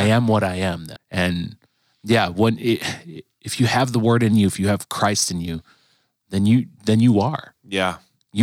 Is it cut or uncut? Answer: cut